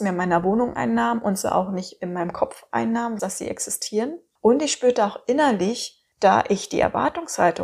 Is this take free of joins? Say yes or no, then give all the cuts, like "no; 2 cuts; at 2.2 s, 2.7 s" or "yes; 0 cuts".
no; 2 cuts; at 3.2 s, 6.1 s